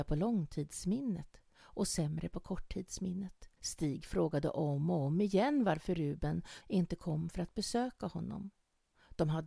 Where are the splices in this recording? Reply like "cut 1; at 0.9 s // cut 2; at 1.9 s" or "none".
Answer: cut 1; at 3.6 s // cut 2; at 6.6 s